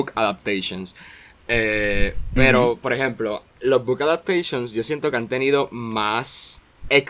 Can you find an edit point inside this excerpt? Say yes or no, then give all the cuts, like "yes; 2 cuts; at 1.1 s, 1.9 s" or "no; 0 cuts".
no; 0 cuts